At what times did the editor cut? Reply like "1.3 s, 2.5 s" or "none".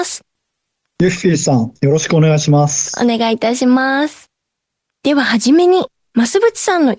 none